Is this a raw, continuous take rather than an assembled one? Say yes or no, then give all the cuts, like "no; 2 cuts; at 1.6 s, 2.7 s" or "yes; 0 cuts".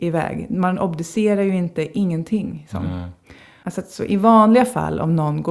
no; 1 cut; at 3.6 s